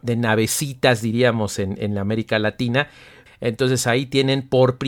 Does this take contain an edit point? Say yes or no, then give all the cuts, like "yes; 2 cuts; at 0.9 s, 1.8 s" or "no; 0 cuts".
yes; 1 cut; at 3.3 s